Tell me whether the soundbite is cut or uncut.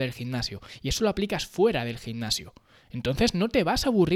uncut